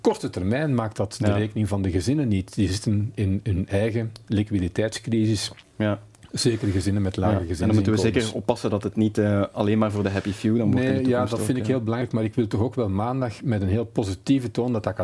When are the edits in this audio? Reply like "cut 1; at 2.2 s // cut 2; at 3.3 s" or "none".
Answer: none

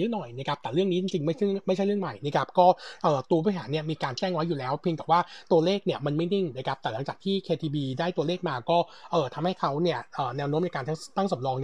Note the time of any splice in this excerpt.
none

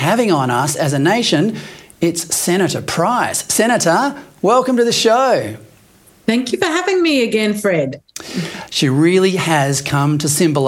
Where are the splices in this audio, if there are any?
cut 1; at 8.7 s

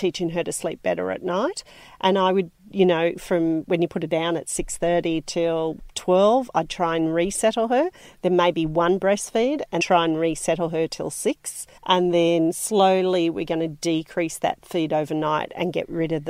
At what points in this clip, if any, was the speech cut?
cut 1; at 9.8 s // cut 2; at 11.8 s

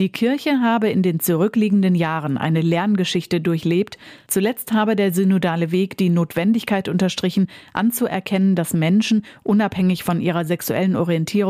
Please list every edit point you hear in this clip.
none

